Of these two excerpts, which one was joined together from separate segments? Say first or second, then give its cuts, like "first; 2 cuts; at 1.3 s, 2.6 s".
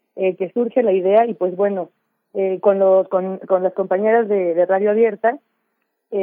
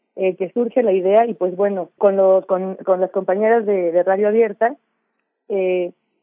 second; 1 cut; at 2.0 s